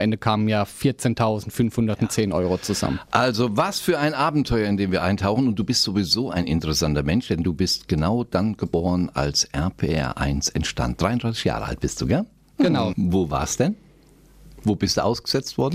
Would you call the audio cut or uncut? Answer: cut